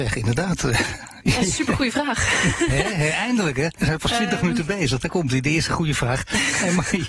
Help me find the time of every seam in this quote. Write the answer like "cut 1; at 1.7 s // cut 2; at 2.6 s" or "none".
none